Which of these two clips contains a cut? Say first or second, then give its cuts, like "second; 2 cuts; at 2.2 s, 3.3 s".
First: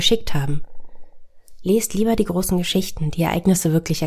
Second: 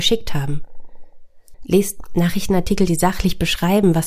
second; 1 cut; at 1.5 s